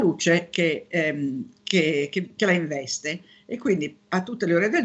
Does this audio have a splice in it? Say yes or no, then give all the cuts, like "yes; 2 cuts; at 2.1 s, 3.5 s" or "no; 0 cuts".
no; 0 cuts